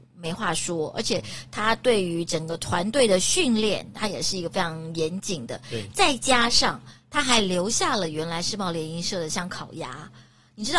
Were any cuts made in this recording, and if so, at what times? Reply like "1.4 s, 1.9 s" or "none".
none